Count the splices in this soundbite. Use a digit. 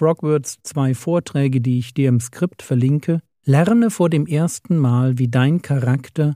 1